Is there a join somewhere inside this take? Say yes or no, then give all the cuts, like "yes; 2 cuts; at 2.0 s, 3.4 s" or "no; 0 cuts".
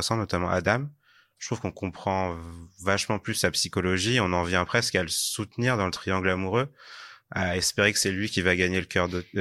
no; 0 cuts